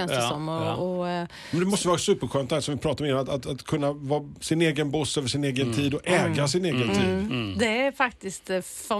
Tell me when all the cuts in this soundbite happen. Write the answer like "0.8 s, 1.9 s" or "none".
none